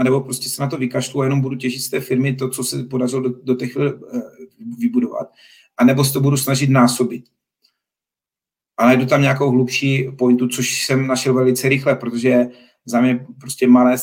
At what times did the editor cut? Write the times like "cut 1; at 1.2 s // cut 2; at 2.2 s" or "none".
none